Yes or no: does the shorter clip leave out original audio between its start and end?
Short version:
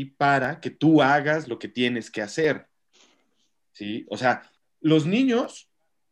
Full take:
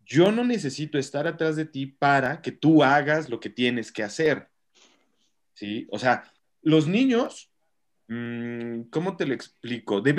no